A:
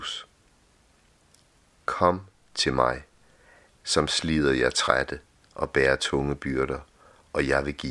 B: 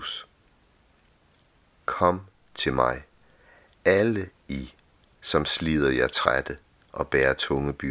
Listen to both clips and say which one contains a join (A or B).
A